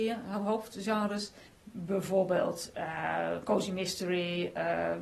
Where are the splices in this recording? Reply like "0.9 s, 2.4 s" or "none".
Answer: 1.5 s